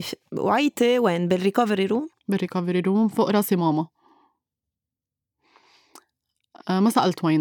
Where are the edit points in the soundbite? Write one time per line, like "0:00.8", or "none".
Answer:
0:02.2